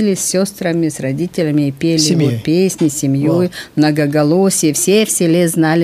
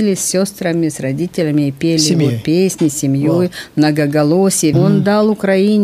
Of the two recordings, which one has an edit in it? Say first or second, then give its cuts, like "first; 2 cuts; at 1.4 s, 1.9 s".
second; 1 cut; at 4.7 s